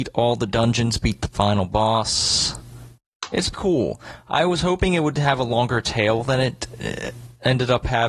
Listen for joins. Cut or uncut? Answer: cut